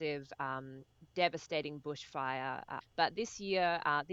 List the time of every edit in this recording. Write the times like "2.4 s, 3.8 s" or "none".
2.8 s